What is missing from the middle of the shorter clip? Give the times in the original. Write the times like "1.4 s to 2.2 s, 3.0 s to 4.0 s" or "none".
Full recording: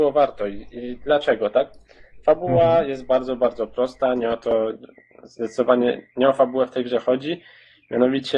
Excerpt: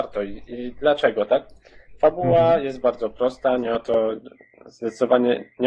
3.1 s to 3.4 s